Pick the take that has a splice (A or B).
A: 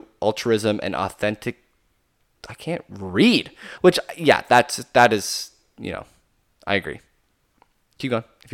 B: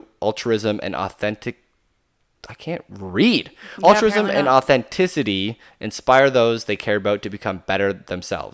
A